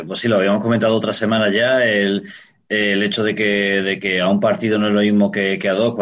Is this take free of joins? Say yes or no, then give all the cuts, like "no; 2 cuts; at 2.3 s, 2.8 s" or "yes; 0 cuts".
yes; 0 cuts